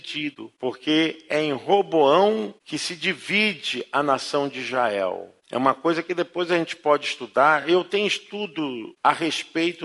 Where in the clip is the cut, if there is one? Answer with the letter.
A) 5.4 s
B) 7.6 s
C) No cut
C